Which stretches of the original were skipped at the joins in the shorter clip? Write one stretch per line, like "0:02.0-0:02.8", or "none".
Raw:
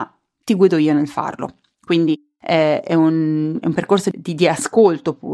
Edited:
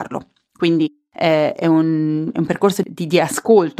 none